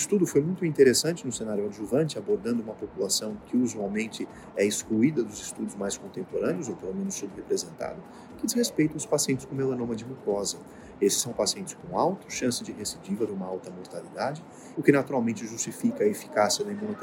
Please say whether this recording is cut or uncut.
cut